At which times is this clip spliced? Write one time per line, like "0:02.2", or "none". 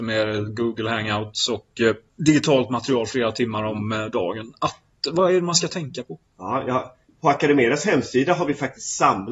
0:07.1